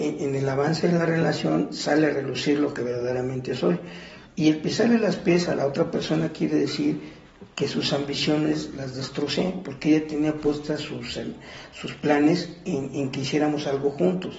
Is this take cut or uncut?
cut